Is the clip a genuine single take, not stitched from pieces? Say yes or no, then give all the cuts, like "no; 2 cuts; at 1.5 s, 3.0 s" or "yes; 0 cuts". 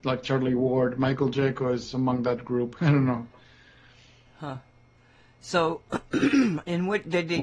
no; 1 cut; at 2.8 s